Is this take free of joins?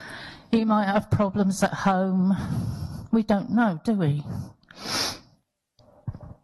yes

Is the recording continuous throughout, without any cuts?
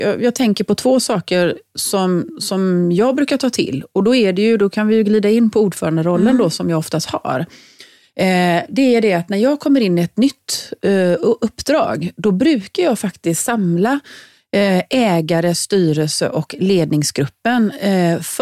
yes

